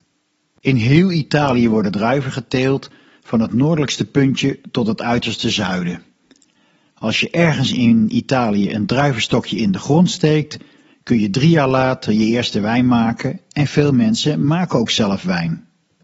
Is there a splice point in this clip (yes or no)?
no